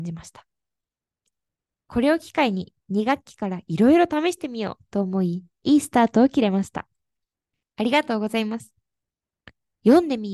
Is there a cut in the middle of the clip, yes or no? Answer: no